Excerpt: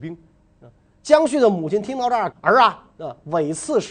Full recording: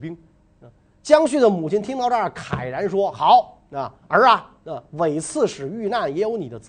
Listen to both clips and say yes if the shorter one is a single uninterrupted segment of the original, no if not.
no